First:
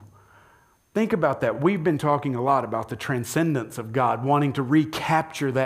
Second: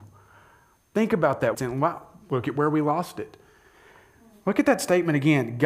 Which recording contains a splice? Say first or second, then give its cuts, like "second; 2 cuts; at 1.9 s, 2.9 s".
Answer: second; 1 cut; at 1.5 s